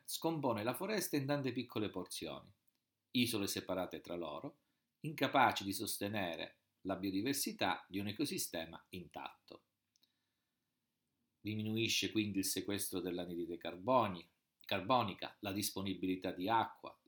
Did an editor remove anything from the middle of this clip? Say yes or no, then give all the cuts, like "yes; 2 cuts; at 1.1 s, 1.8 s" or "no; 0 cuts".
no; 0 cuts